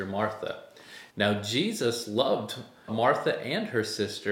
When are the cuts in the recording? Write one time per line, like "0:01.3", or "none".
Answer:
0:01.1
0:02.9